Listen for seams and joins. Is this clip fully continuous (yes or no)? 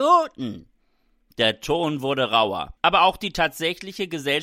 no